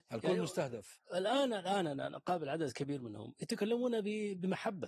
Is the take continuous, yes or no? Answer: yes